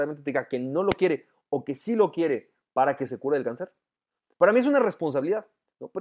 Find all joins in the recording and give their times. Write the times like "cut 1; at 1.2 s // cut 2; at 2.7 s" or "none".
none